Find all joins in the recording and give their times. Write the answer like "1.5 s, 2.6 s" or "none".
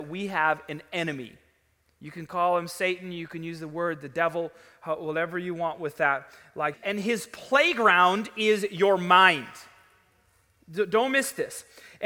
6.7 s